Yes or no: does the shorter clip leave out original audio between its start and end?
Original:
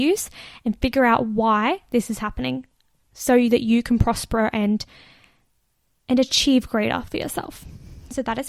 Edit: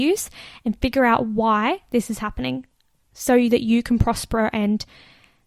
no